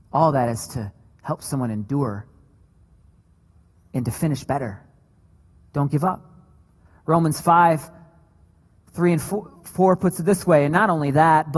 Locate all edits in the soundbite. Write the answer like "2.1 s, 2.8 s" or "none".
none